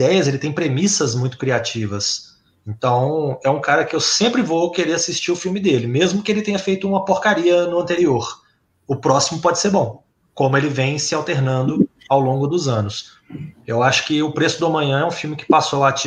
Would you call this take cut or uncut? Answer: uncut